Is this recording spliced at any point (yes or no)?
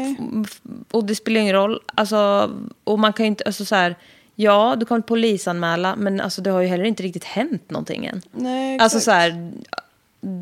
no